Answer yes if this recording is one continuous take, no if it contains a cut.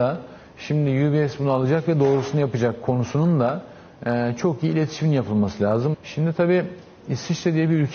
no